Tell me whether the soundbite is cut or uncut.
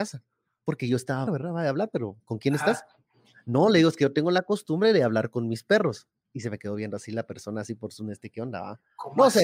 cut